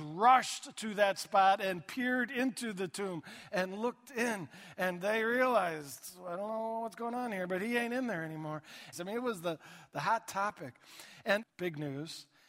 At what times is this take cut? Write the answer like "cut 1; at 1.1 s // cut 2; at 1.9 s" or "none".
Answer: cut 1; at 8.9 s // cut 2; at 11.4 s